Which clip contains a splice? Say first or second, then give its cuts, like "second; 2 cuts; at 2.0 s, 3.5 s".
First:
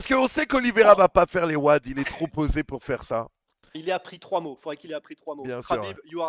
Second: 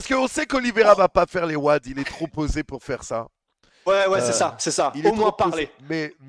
first; 1 cut; at 3.7 s